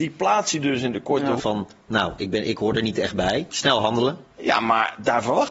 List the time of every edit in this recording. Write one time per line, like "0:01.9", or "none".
0:01.4
0:03.5